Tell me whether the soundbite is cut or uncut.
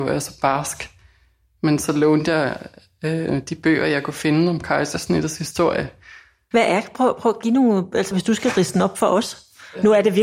cut